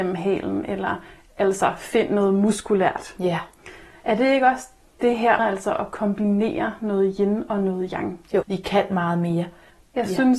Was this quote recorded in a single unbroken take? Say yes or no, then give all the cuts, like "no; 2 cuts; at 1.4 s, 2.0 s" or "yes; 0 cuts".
no; 2 cuts; at 5.4 s, 8.4 s